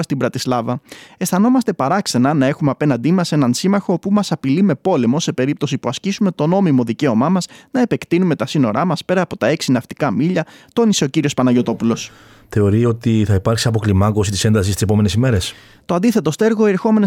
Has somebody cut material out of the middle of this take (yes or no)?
yes